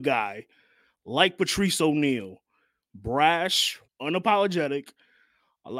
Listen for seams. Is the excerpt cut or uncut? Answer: cut